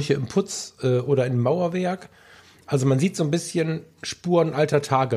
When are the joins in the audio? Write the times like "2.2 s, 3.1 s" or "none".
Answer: none